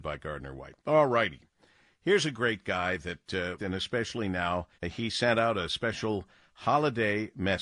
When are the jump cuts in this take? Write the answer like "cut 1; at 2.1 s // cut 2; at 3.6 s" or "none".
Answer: cut 1; at 3.6 s // cut 2; at 4.7 s